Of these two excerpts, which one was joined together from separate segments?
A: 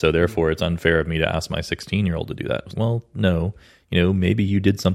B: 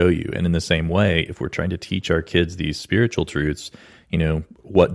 A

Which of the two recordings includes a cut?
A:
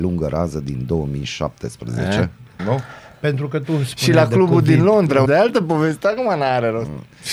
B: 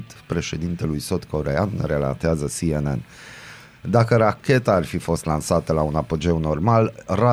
A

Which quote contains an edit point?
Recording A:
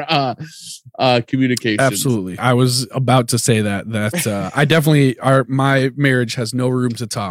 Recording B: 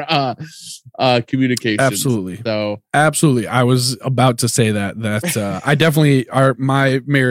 A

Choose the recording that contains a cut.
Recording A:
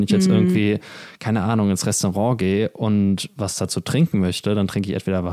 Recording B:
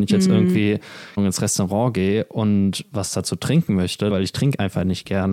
B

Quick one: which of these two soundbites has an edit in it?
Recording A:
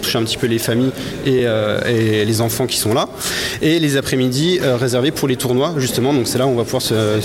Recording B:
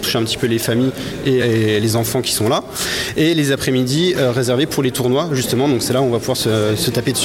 B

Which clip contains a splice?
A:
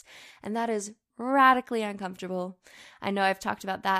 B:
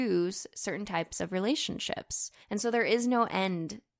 B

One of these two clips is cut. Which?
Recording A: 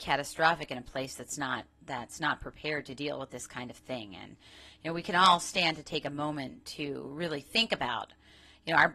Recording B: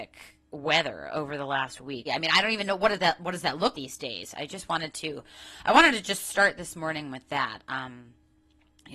B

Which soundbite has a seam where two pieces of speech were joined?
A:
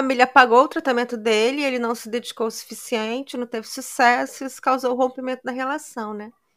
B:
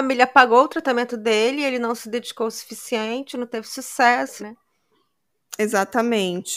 B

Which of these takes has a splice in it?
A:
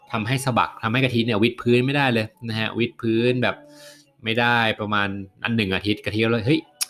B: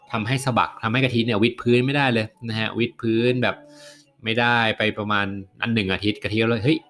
A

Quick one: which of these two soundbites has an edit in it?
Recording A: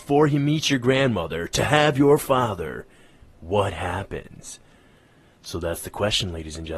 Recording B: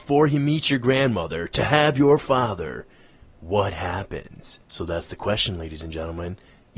B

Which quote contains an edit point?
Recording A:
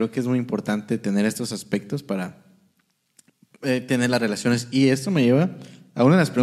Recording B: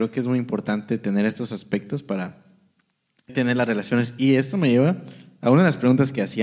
B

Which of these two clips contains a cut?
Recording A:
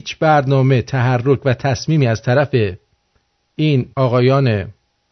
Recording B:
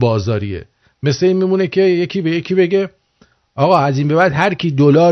A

